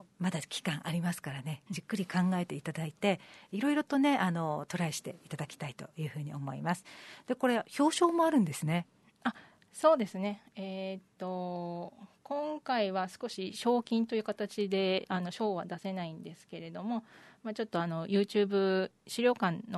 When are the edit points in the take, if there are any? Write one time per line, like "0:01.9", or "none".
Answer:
none